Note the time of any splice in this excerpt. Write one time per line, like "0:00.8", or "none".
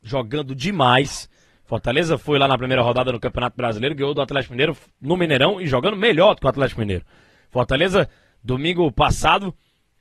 none